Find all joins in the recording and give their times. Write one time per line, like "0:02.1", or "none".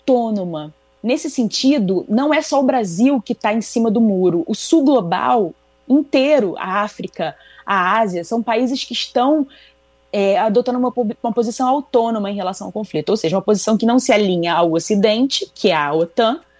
none